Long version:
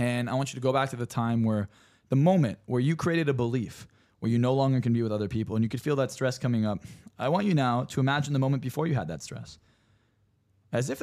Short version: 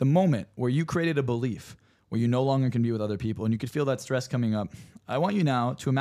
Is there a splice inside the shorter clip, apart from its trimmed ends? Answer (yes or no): no